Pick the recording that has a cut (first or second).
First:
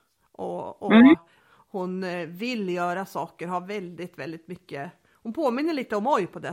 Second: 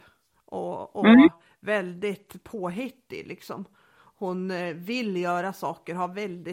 first